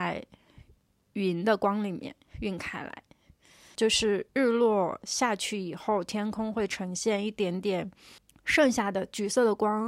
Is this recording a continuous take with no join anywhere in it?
no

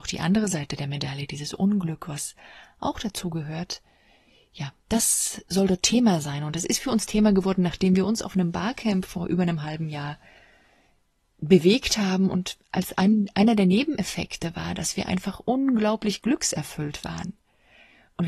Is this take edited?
no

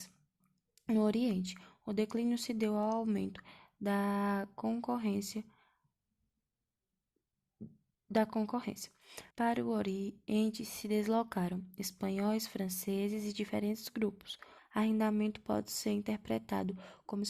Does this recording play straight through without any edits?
no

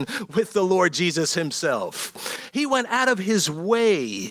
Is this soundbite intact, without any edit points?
yes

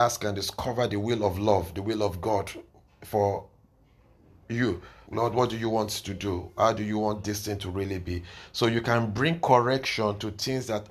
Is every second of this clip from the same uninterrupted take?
no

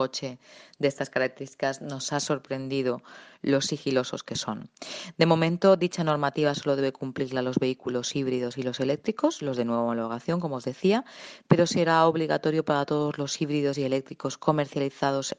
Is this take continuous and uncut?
yes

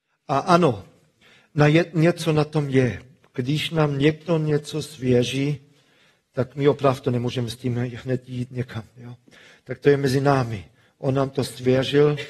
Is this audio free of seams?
yes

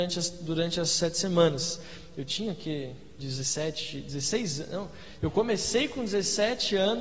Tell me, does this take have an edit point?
no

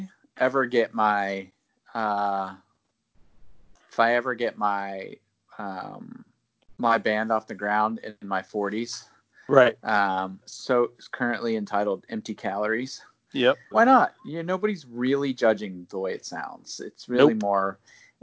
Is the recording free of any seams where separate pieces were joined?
no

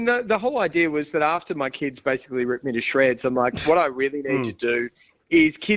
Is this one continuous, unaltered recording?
yes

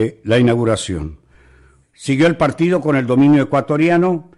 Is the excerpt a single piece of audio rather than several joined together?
no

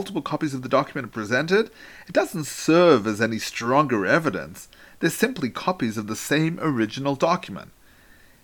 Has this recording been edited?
no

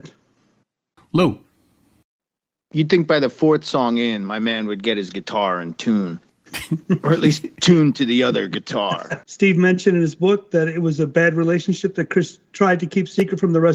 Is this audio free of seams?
no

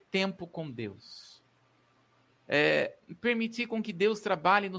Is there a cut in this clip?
yes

